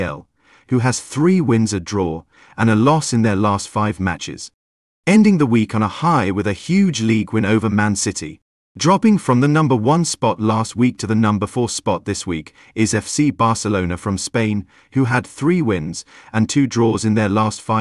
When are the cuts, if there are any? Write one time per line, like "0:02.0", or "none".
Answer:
0:08.6